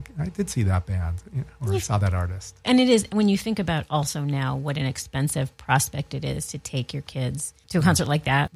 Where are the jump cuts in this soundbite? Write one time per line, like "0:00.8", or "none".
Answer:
0:02.6